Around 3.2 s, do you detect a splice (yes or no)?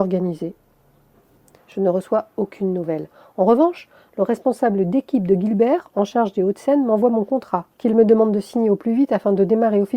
no